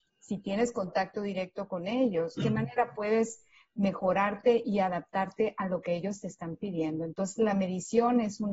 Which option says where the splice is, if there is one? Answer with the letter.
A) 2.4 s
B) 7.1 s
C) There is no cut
A